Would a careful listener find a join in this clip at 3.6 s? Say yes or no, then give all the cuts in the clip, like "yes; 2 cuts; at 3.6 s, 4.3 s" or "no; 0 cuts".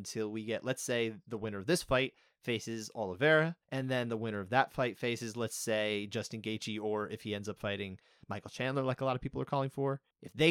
yes; 1 cut; at 3.6 s